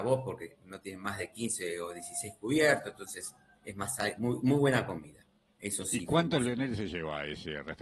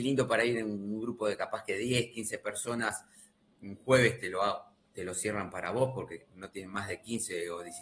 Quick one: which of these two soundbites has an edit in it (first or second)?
first